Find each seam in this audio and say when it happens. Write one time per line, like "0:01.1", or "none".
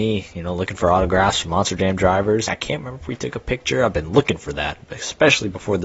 0:02.5